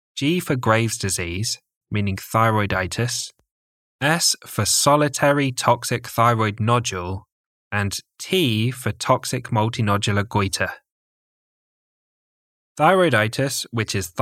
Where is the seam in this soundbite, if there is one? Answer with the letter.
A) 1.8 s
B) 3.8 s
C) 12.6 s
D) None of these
A